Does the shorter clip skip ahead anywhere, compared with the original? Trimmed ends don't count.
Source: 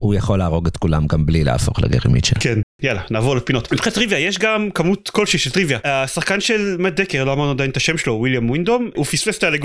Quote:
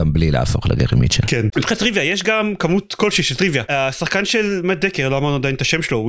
yes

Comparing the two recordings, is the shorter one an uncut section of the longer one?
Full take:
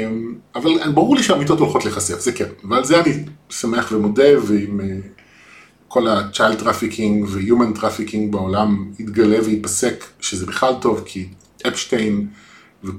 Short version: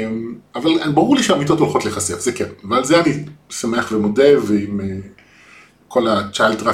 yes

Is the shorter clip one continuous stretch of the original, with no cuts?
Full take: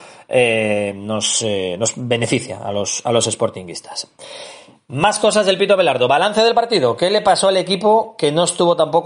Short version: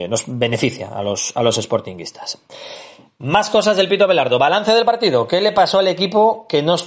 yes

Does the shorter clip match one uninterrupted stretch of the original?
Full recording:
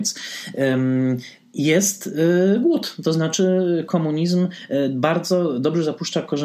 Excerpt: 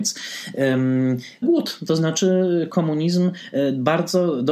no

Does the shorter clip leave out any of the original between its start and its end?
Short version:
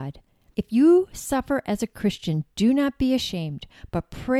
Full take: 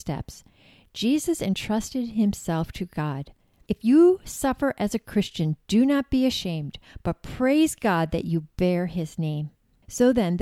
no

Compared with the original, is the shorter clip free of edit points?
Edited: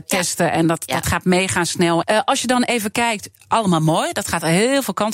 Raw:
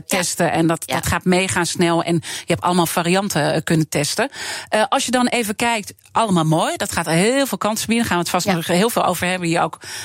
no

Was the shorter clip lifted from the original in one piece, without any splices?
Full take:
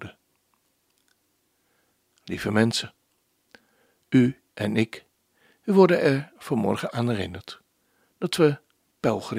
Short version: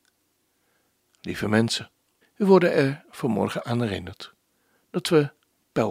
no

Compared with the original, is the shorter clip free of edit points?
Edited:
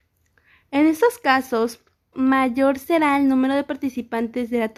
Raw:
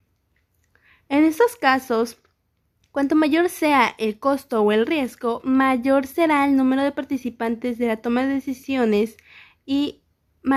no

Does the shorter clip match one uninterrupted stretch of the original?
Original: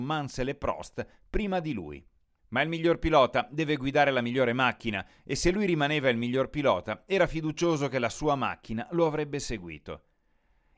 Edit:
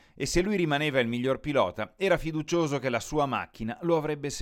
yes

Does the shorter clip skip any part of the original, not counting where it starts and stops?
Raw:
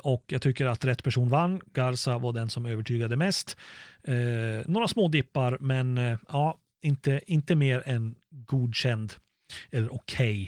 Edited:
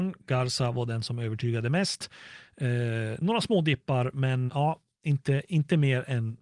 yes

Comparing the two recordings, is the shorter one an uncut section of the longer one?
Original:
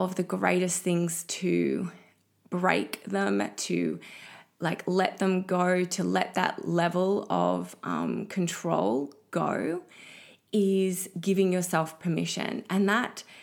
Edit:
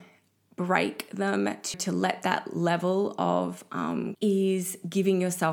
no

